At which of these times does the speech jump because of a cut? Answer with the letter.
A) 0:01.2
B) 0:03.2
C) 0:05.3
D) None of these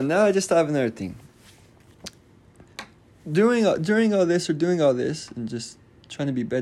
C